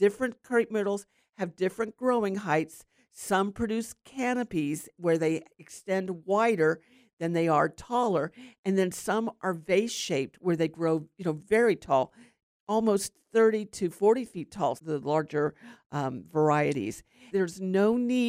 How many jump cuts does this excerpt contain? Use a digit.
2